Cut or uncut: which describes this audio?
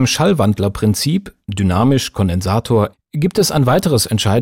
cut